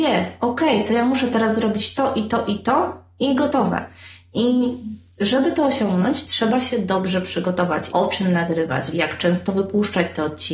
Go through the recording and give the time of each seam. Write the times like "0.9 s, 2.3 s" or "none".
7.9 s, 8.9 s